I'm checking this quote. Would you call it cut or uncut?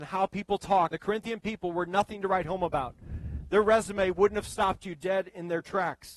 cut